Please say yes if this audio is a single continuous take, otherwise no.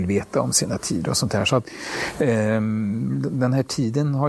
yes